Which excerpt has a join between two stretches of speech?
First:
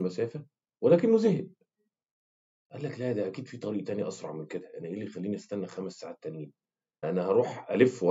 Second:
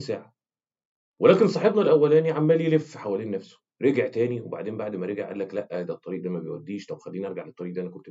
first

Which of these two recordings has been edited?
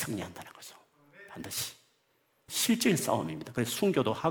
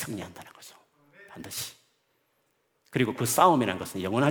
first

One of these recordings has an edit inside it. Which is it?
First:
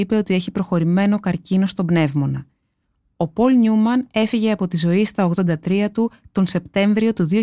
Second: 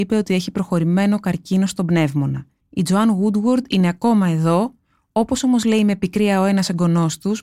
second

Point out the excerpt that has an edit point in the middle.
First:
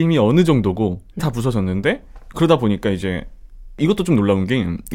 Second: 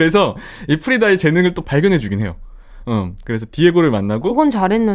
first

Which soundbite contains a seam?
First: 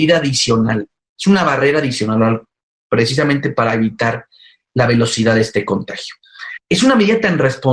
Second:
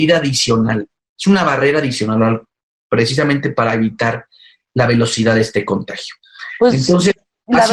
first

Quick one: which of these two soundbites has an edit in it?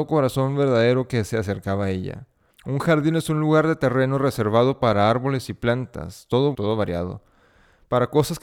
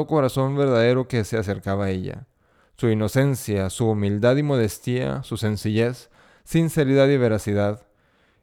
first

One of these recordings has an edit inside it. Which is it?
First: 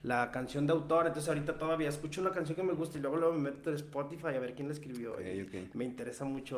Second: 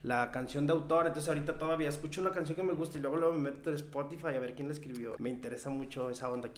second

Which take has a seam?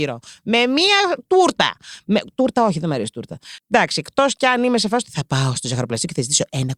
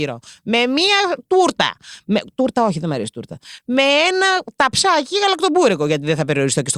first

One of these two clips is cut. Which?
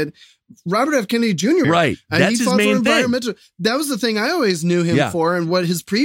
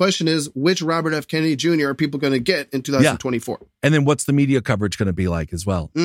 first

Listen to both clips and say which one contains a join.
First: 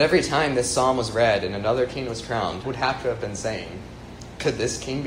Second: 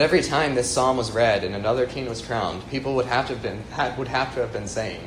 first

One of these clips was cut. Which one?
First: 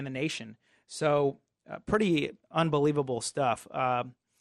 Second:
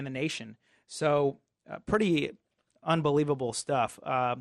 first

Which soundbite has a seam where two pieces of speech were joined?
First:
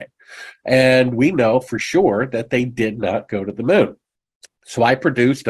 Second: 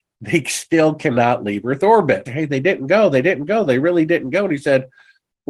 second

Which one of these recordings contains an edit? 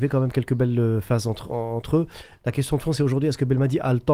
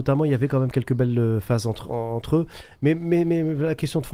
first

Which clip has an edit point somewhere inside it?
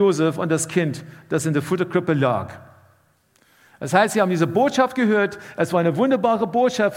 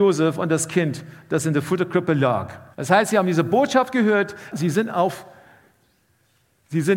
second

